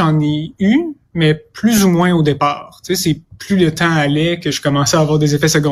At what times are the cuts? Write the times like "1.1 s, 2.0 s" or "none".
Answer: none